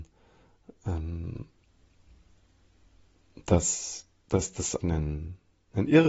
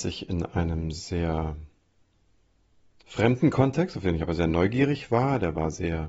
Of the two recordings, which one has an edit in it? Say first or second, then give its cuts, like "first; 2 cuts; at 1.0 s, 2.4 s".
first; 1 cut; at 4.8 s